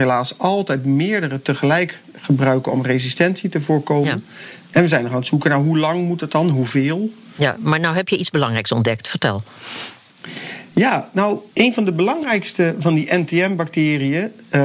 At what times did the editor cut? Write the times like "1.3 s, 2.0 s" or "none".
11.5 s